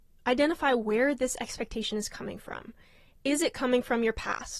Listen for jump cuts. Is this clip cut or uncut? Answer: uncut